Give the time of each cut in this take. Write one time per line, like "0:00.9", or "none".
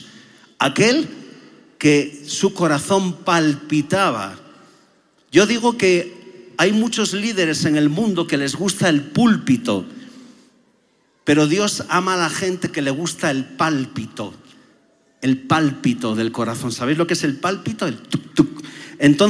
0:18.3

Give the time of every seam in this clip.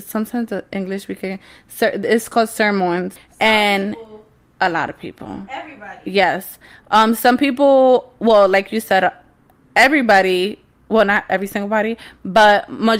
0:03.2

